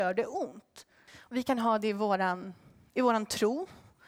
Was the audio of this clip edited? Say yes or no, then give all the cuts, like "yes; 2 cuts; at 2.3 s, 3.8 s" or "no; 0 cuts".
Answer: yes; 1 cut; at 1.1 s